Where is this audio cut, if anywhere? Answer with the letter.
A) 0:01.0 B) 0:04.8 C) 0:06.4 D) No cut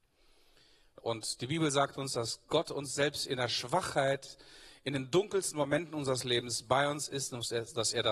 A